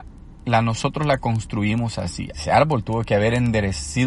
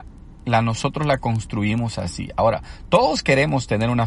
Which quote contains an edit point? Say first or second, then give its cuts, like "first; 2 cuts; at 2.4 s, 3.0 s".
first; 1 cut; at 2.3 s